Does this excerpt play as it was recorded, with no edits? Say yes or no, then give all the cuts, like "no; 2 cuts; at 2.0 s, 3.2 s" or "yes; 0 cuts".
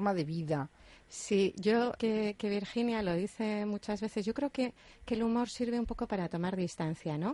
no; 1 cut; at 2.0 s